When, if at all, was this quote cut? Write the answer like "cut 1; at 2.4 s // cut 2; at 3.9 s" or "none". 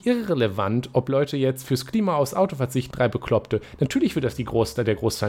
cut 1; at 2.9 s